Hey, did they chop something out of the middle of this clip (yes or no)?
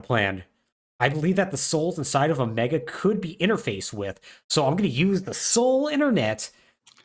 no